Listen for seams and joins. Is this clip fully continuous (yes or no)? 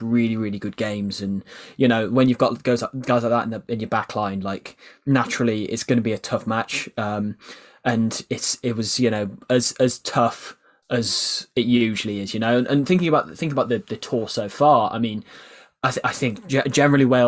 yes